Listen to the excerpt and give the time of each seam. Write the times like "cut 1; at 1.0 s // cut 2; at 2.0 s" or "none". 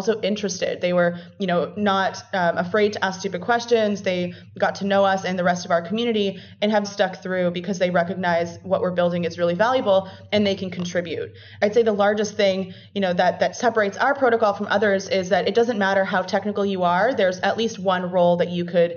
cut 1; at 6.8 s